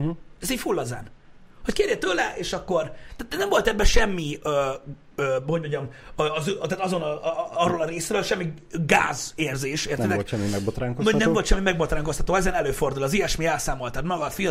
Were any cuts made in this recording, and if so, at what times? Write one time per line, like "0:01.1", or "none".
none